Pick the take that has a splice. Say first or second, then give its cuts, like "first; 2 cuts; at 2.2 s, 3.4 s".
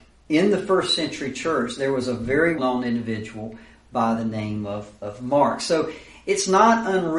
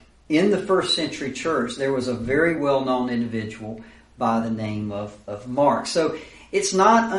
first; 1 cut; at 2.6 s